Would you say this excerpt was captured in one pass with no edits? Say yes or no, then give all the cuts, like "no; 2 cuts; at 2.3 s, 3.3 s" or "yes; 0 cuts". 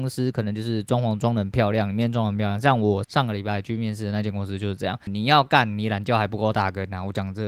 no; 2 cuts; at 3.0 s, 5.1 s